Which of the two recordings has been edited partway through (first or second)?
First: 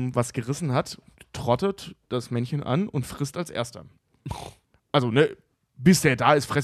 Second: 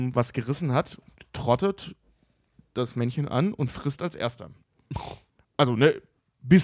first